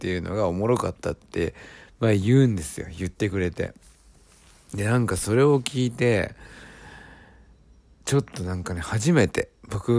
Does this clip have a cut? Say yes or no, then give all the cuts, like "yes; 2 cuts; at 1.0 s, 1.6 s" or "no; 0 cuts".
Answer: no; 0 cuts